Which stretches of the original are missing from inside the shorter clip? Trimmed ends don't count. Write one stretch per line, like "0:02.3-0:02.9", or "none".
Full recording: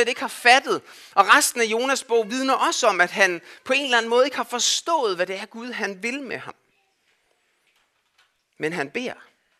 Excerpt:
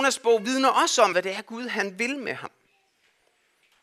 0:03.0-0:05.2